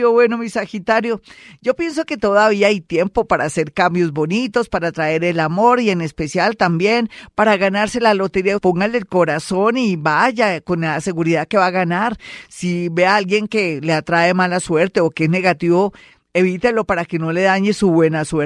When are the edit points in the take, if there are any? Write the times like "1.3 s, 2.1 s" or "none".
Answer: 8.6 s